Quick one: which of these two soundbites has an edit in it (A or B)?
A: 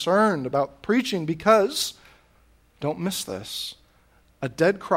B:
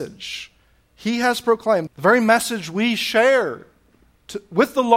B